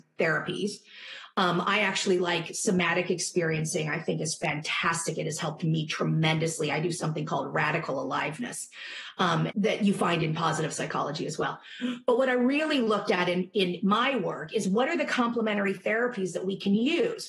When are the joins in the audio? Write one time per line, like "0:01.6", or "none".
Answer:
0:09.5